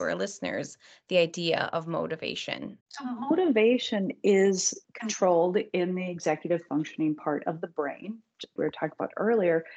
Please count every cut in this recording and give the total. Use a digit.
3